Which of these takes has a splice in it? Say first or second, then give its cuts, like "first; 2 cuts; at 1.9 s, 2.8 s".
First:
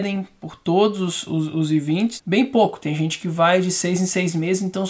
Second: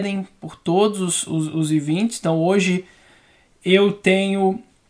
first; 1 cut; at 2.2 s